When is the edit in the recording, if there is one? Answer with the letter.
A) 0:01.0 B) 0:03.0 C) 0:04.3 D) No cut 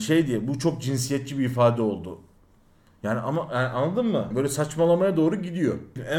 C